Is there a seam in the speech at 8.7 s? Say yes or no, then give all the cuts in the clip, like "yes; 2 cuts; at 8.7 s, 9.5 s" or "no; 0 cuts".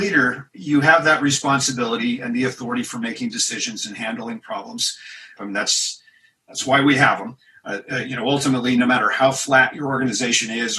no; 1 cut; at 5.4 s